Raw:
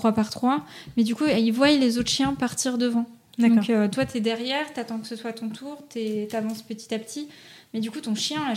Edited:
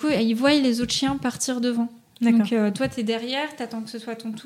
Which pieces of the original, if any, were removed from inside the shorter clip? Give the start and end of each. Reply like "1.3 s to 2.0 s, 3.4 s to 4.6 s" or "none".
none